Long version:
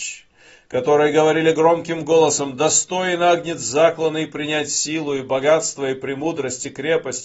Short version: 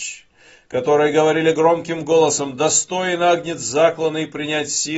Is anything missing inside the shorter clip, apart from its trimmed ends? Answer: no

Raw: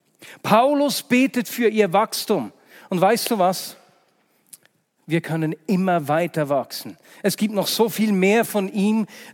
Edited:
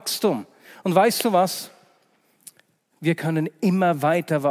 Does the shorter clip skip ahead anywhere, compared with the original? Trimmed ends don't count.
no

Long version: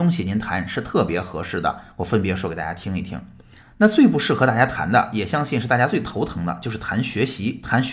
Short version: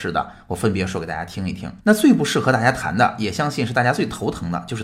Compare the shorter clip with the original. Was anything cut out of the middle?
yes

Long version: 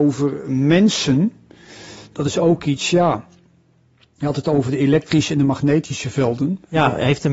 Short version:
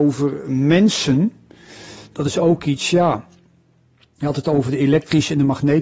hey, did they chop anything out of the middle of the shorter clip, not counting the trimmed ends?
no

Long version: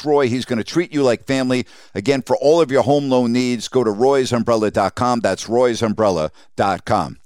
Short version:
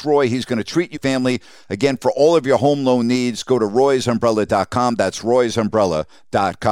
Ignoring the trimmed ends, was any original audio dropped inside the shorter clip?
yes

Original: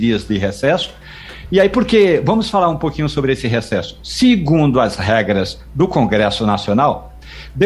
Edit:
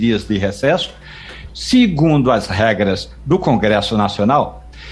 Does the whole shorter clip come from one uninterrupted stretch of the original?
no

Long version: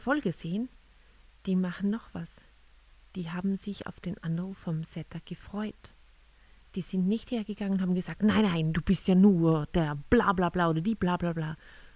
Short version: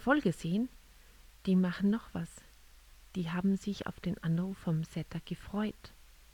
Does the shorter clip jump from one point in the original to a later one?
no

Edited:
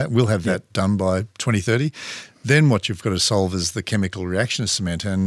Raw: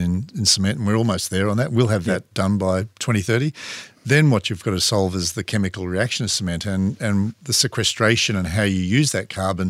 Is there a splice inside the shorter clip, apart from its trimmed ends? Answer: no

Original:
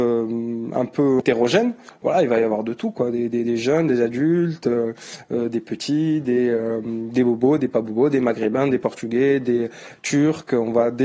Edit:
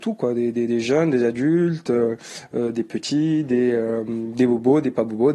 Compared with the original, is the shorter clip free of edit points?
yes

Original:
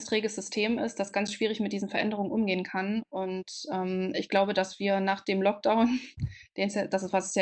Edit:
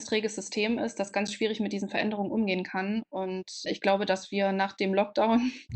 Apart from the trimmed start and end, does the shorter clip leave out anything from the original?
yes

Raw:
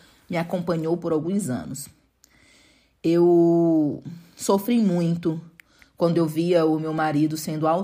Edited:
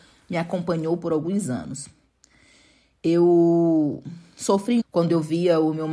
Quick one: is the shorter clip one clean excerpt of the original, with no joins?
no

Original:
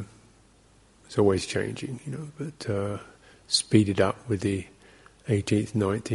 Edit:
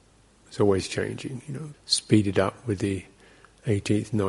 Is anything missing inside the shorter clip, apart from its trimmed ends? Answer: yes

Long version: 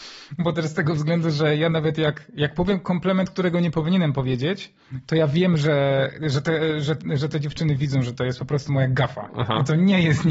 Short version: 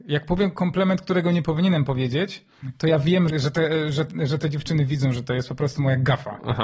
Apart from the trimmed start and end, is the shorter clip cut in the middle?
yes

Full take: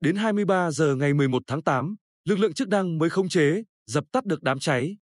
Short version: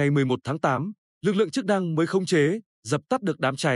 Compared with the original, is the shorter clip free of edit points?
yes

